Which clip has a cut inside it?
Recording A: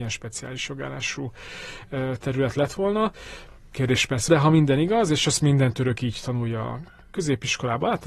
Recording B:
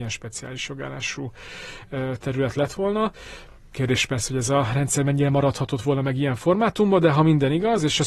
A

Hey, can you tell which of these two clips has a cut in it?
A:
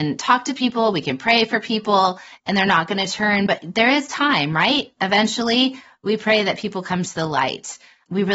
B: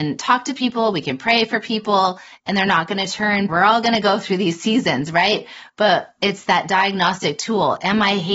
B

